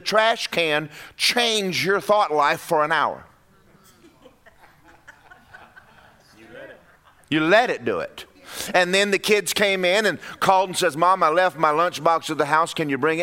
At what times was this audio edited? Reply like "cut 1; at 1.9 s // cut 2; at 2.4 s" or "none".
none